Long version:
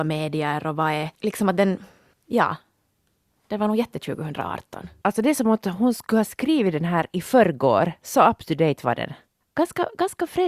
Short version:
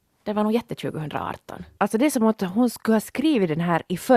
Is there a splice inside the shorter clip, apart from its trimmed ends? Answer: no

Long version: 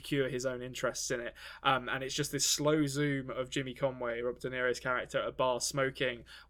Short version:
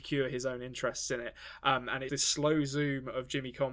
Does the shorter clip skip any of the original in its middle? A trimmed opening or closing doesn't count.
yes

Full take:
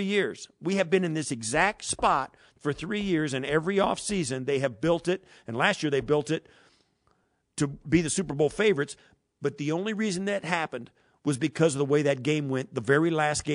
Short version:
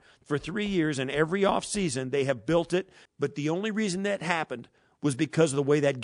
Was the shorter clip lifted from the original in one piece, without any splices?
no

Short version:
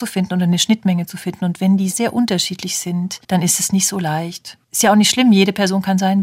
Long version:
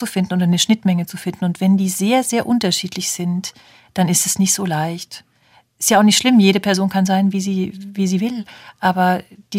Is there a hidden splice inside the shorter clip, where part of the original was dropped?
yes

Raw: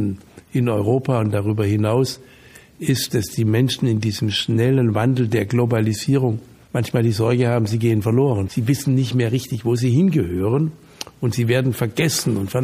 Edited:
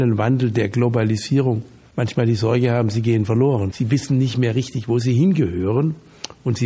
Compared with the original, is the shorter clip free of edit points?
yes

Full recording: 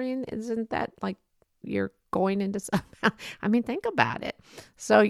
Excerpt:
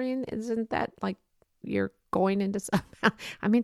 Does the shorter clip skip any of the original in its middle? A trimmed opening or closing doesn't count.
no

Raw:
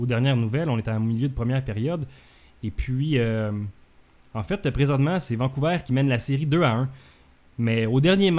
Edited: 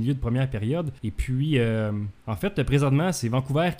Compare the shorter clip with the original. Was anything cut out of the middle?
yes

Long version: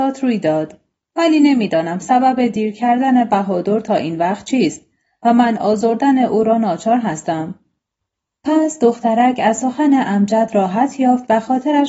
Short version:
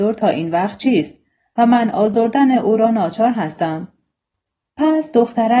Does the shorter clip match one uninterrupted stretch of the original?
yes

